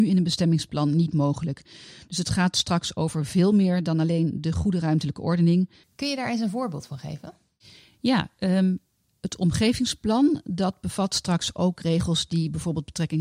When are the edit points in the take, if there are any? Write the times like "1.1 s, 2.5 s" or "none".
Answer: 5.8 s